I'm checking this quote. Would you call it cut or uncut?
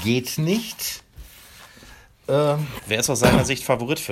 cut